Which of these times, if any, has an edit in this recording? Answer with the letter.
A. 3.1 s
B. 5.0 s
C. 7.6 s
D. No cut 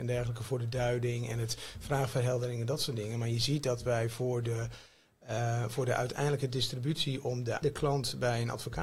C